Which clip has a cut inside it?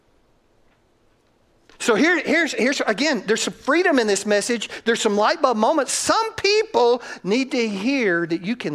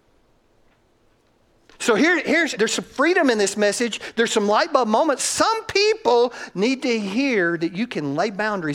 second; 1 cut; at 2.5 s

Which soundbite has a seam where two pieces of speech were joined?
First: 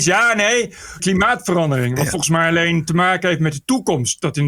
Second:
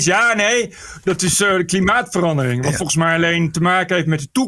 first; 1 cut; at 1.0 s

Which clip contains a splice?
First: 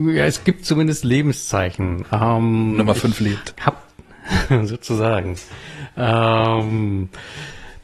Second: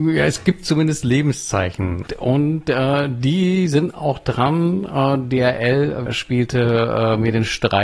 second; 2 cuts; at 2.1 s, 6.1 s

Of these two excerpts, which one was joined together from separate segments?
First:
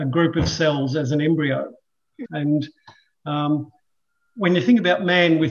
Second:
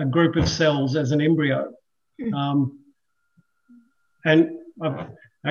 first; 1 cut; at 2.2 s

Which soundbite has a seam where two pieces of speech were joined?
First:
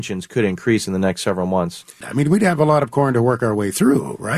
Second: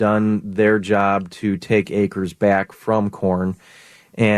first; 1 cut; at 2.0 s

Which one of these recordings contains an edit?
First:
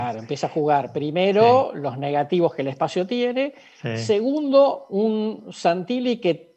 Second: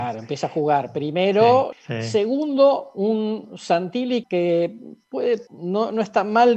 second; 3 cuts; at 1.7 s, 4.2 s, 5.5 s

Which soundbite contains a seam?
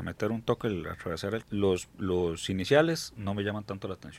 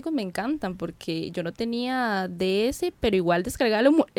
first; 1 cut; at 1.4 s

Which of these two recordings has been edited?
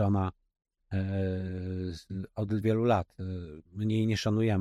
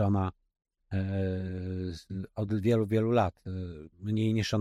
first; 1 cut; at 2.6 s

